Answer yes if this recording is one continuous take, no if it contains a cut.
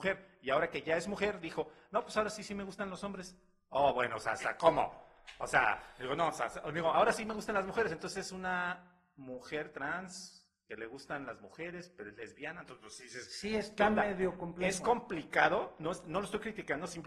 yes